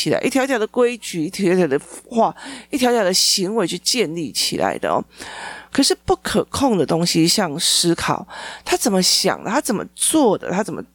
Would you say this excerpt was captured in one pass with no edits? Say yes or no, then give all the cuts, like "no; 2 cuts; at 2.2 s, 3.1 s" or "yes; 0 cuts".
yes; 0 cuts